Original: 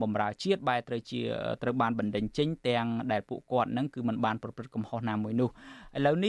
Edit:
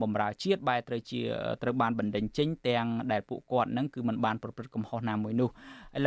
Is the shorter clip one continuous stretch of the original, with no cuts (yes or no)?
yes